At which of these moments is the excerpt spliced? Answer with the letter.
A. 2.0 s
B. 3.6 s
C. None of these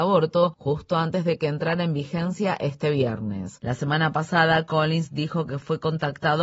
B